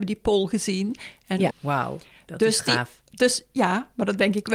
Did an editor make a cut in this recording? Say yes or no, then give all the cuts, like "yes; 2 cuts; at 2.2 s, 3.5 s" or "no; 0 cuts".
yes; 1 cut; at 1.5 s